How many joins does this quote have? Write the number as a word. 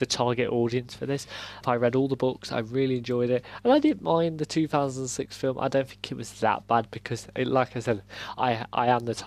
one